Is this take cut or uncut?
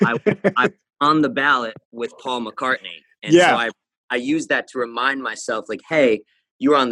uncut